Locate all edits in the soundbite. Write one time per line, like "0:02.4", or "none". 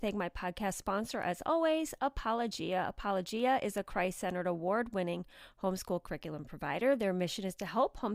none